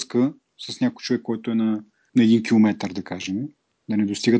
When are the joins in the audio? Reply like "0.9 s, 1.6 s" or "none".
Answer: 2.1 s